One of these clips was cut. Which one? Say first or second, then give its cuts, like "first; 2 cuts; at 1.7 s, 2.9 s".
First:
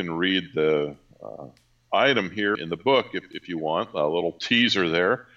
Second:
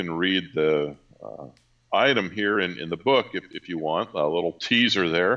first; 1 cut; at 2.6 s